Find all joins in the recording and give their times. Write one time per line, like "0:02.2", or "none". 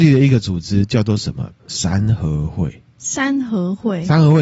none